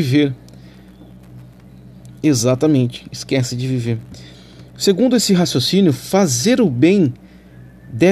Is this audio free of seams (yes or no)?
yes